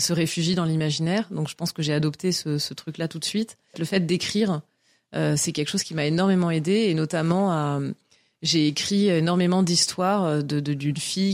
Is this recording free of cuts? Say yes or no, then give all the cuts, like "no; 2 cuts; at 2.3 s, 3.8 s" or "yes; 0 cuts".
no; 1 cut; at 3.7 s